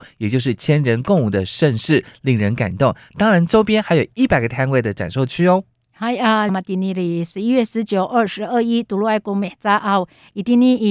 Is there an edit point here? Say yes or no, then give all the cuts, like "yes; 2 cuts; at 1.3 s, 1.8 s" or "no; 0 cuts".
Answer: yes; 1 cut; at 6.5 s